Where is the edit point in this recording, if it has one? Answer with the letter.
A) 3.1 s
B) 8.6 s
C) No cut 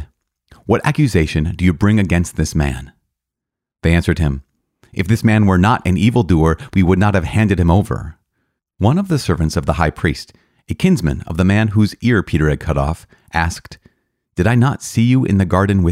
B